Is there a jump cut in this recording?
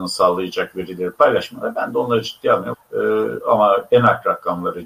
yes; 1 cut; at 2.7 s

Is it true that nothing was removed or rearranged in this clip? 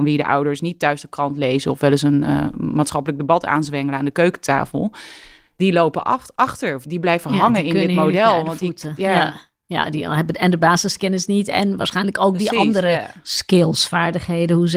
no; 1 cut; at 6.8 s

